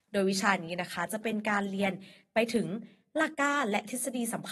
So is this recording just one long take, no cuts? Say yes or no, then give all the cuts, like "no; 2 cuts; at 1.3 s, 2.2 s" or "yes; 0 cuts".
no; 1 cut; at 3.3 s